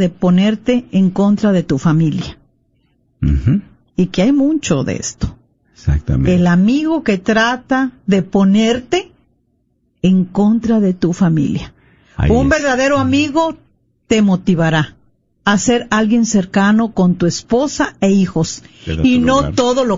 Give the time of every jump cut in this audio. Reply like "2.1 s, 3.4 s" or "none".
none